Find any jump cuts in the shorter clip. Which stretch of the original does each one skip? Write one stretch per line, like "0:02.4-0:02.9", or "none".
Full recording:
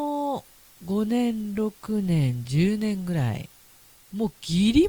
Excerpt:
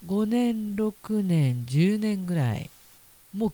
none